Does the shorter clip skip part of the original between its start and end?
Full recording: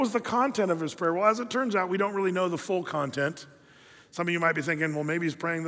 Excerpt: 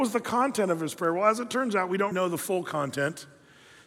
yes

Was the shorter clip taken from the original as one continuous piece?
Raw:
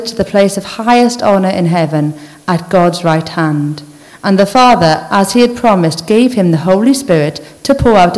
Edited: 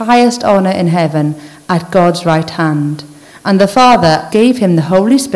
no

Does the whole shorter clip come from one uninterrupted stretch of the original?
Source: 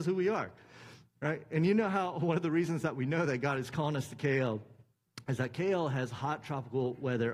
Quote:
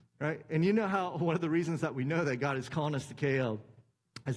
yes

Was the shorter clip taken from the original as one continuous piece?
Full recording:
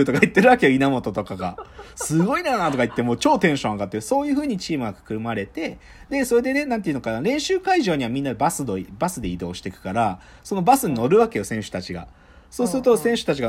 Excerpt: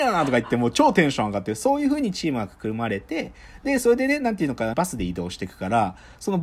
no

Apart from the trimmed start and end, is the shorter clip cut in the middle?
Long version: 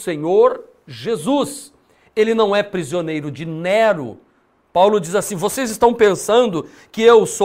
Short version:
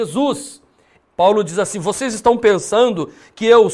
yes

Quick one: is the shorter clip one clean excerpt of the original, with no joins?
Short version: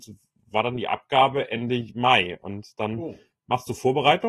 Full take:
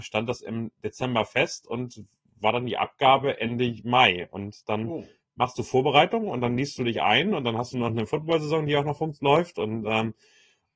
yes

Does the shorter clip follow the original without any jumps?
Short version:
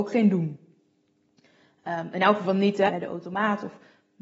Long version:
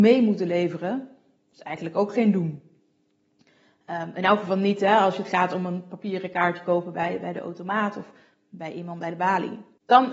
no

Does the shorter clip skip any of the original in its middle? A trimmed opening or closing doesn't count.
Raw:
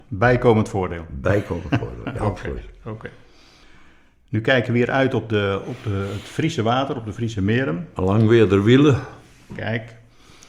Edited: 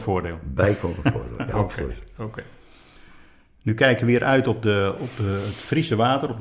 no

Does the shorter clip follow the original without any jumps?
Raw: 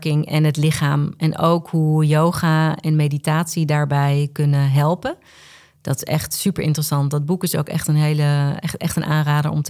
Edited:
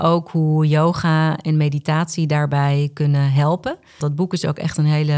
no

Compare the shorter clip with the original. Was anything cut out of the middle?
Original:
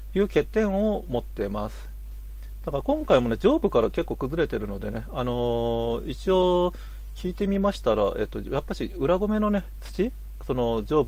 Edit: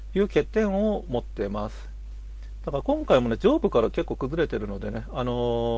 no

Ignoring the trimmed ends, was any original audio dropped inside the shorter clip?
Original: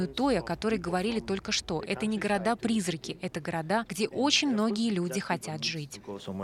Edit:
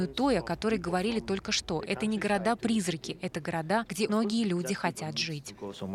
yes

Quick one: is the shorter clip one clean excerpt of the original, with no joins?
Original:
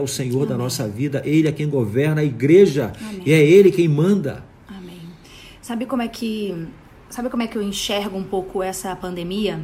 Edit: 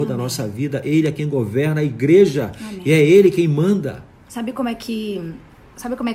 no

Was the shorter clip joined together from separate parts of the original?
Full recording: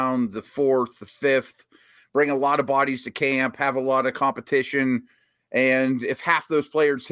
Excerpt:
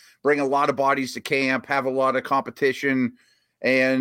no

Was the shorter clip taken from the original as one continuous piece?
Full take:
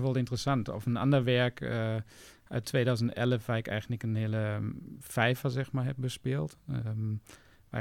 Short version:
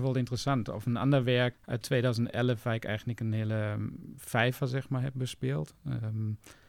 no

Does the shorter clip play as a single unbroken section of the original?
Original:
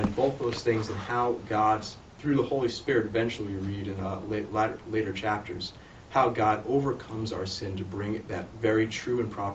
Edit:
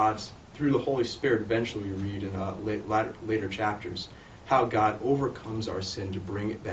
yes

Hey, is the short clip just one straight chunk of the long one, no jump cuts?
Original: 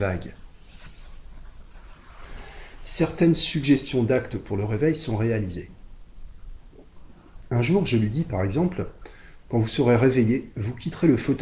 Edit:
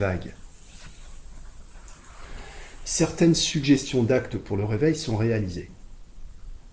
yes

